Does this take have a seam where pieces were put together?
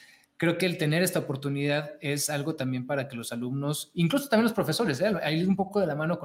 no; 0 cuts

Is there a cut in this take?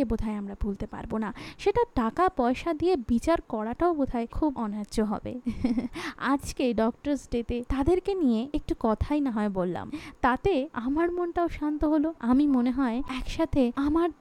no; 0 cuts

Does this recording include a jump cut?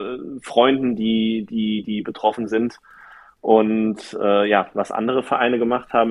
no; 0 cuts

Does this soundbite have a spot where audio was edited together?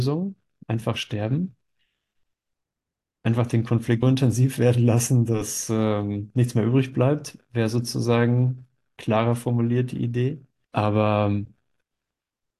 yes; 2 cuts; at 4.0 s, 10.6 s

